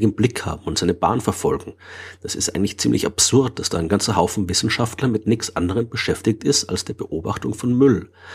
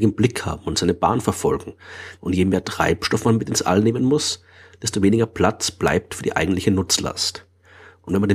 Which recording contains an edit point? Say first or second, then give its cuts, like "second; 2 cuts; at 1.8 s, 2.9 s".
second; 1 cut; at 2.2 s